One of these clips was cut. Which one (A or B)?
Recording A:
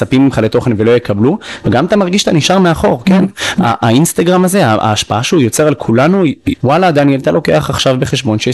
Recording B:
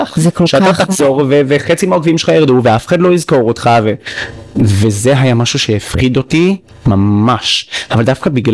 A